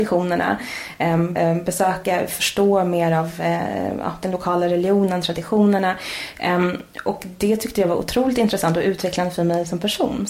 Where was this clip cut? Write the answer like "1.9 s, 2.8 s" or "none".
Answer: 1.3 s